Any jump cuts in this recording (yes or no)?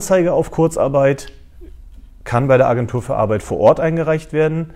no